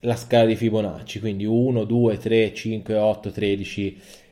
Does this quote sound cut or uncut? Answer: uncut